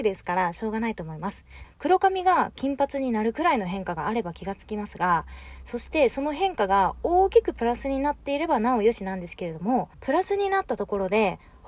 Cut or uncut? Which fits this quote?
cut